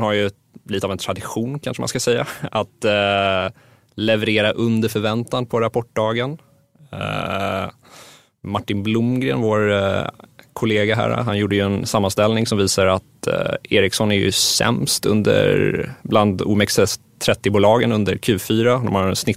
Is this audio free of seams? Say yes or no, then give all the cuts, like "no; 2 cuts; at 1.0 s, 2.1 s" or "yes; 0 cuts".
yes; 0 cuts